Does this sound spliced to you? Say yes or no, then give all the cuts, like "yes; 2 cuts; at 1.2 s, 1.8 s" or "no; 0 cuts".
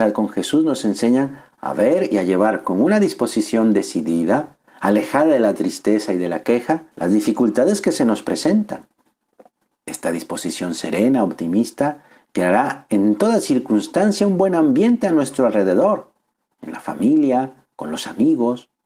yes; 2 cuts; at 6.9 s, 9.7 s